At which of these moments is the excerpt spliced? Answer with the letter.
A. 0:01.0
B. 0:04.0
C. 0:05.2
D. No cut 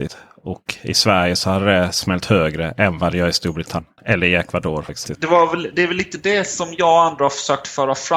B